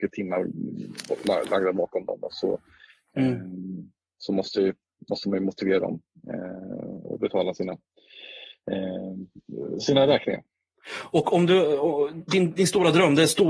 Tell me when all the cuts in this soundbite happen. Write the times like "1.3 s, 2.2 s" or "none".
none